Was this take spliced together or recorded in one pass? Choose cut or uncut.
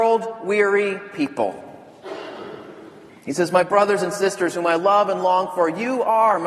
cut